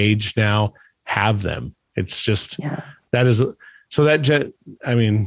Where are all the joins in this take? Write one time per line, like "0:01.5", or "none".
none